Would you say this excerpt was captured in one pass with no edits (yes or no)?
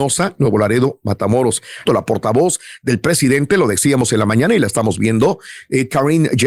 no